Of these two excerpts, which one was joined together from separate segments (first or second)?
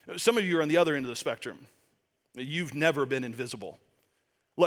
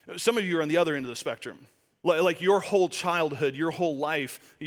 second